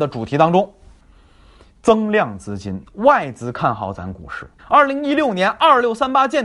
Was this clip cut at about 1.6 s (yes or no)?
no